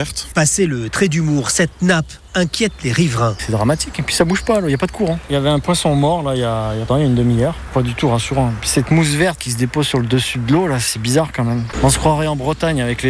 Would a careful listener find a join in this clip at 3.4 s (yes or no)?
no